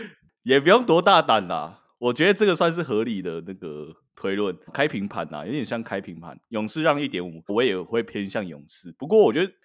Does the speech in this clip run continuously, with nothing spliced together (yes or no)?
no